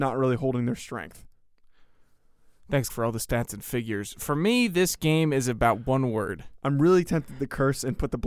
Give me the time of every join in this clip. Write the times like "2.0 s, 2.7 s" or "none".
2.9 s